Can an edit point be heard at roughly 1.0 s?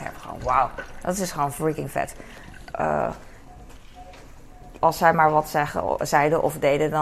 no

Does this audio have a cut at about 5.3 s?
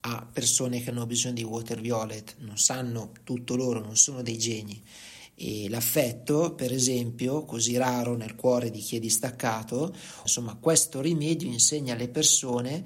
no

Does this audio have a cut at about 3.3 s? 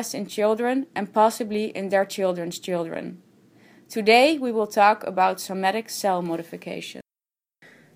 no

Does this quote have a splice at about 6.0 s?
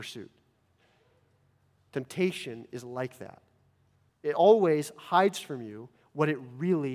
no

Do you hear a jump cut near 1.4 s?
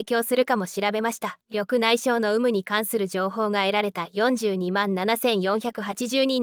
yes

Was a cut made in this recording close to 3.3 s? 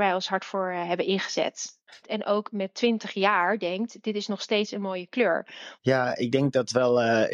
no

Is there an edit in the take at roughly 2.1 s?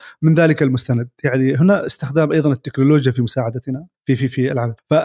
no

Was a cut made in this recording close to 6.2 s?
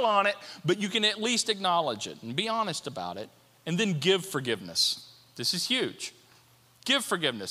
no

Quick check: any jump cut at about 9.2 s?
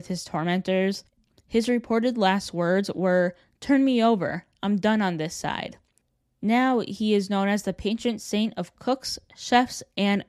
no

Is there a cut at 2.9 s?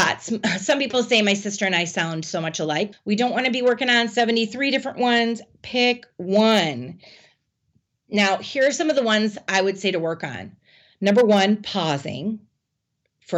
yes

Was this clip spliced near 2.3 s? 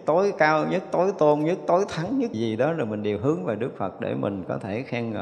yes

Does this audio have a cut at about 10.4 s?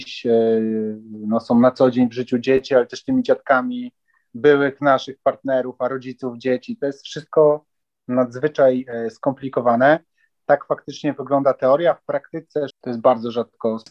no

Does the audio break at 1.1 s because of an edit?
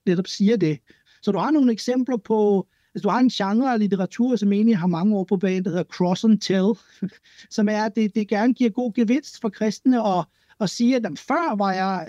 yes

